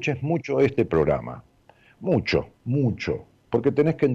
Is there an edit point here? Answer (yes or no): yes